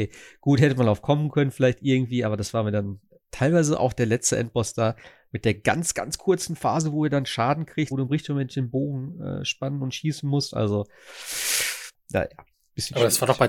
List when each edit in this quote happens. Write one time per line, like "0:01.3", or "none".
0:07.9

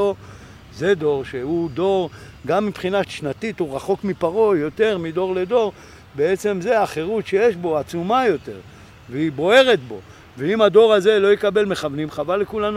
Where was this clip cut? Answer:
0:03.0

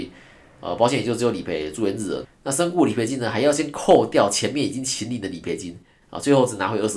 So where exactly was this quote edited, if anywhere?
0:02.2

